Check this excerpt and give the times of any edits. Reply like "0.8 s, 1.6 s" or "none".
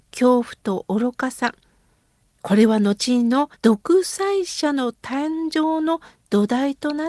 3.5 s